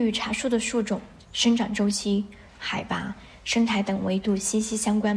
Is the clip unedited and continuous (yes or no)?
no